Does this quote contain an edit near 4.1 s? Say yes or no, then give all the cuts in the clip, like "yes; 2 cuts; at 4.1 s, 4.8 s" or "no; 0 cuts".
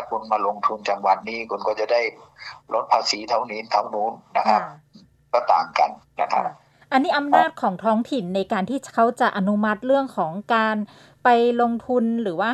no; 0 cuts